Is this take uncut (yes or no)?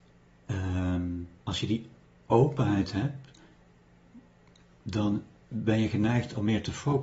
no